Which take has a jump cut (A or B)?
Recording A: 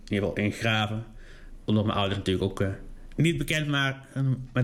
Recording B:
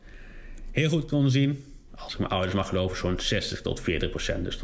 B